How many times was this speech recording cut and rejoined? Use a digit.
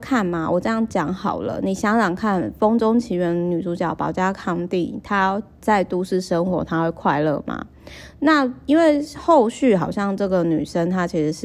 0